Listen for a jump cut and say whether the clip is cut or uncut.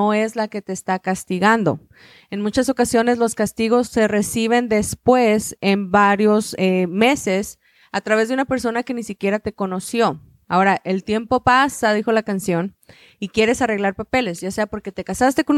uncut